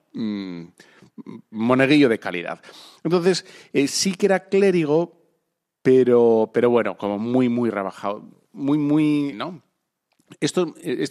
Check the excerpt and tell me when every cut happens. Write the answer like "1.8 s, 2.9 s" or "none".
1.5 s, 9.3 s

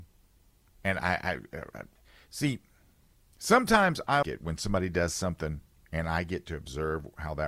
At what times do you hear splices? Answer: 4.2 s

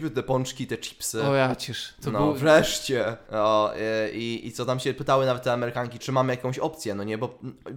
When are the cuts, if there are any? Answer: 3.2 s, 6.0 s

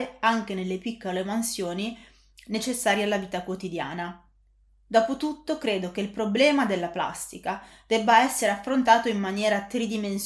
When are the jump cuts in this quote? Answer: none

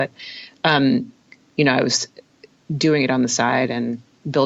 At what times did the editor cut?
1.4 s

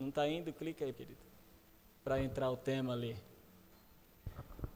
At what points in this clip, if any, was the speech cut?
0.9 s

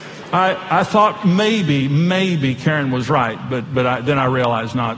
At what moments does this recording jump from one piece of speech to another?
none

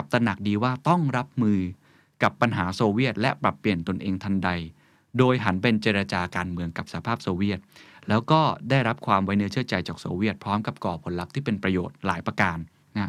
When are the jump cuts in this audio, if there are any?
none

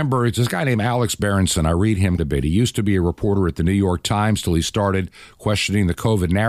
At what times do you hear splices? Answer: 2.2 s

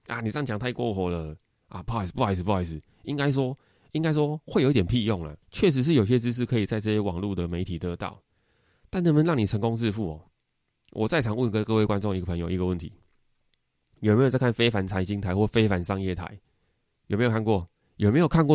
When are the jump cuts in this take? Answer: 5.4 s

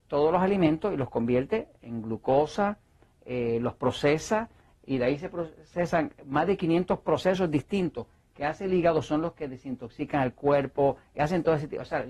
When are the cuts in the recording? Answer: none

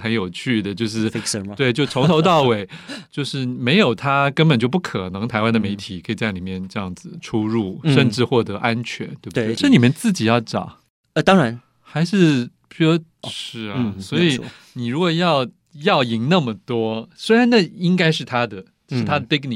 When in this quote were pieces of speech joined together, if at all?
9.6 s, 13.2 s

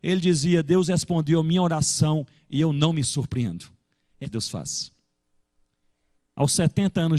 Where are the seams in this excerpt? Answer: 4.2 s

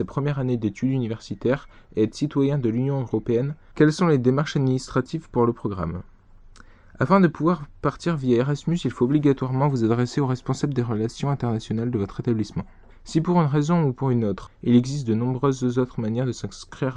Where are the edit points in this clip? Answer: 3.7 s, 12.9 s, 14.5 s

